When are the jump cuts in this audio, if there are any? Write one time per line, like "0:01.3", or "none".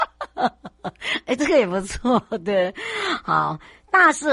none

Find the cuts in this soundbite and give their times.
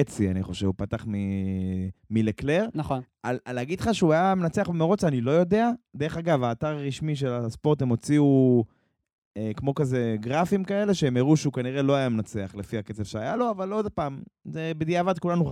0:02.0

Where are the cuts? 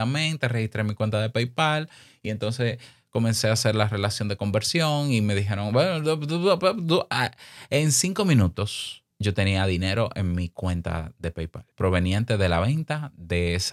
0:09.1
0:11.7

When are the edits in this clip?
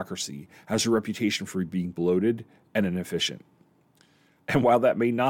0:04.4

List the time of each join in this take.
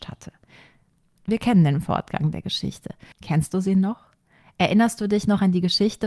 0:03.1

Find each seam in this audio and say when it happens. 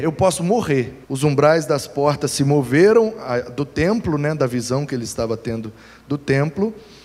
0:01.0

